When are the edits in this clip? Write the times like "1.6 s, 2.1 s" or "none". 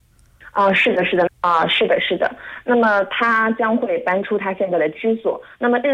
1.3 s